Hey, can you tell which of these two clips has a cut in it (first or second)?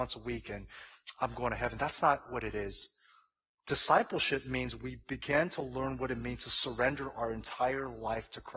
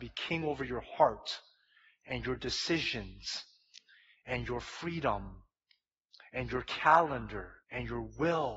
second